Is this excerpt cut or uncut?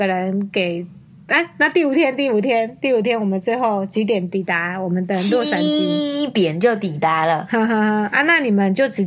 uncut